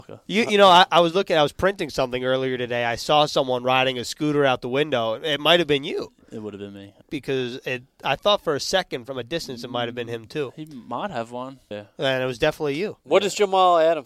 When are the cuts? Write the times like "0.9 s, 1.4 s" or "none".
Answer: 7.0 s, 11.7 s